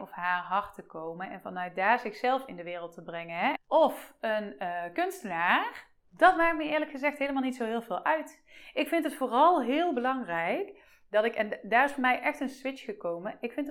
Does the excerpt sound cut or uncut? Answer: cut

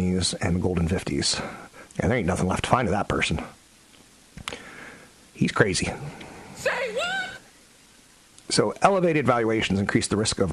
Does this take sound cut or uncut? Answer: cut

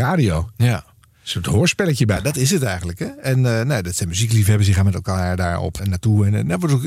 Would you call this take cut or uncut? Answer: cut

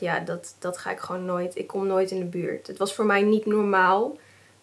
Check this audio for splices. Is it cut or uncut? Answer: uncut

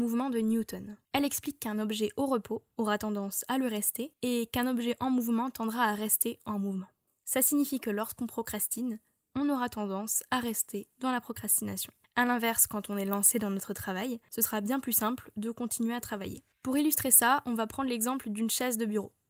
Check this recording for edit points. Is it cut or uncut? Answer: uncut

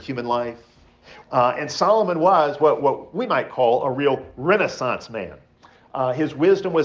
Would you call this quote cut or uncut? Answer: cut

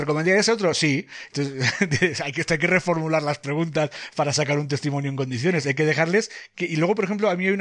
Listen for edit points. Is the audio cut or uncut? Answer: uncut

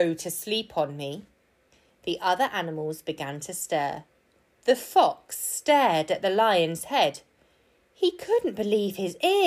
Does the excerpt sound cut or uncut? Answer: uncut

